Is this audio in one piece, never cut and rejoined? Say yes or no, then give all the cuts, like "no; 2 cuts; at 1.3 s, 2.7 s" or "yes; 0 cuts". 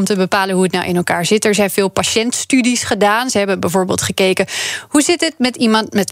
yes; 0 cuts